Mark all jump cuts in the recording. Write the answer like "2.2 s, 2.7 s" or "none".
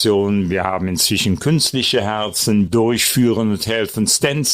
2.7 s